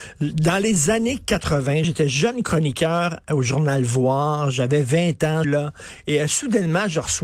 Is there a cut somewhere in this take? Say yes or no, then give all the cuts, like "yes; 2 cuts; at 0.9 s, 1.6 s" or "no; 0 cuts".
yes; 2 cuts; at 1.8 s, 5.4 s